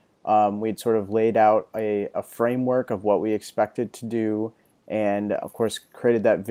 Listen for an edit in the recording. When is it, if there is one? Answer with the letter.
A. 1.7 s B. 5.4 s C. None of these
B